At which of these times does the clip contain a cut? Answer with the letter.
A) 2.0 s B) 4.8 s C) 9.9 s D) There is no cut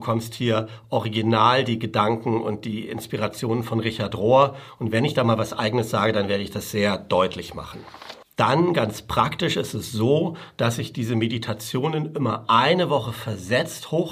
D